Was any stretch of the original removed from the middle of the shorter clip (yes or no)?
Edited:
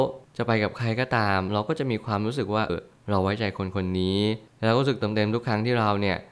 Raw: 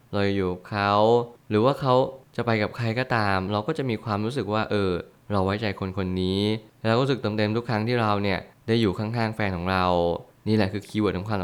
yes